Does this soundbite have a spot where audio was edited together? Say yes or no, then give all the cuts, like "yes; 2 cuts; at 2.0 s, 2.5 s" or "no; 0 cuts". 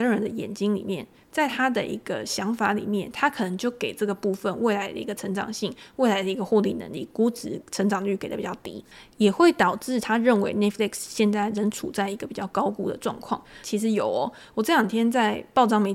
yes; 1 cut; at 13.6 s